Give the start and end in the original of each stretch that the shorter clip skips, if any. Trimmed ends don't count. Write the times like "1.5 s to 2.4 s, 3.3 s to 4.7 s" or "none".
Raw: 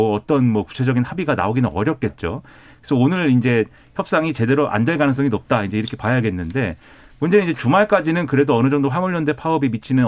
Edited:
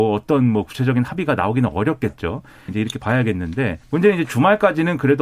2.7 s to 5.7 s, 6.8 s to 7.1 s